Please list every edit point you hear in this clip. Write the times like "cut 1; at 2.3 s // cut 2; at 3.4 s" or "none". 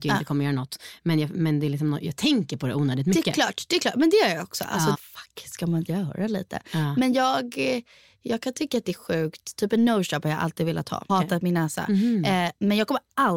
cut 1; at 4.9 s // cut 2; at 11.1 s